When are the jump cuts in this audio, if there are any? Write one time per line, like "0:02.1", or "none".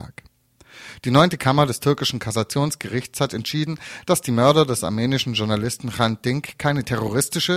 none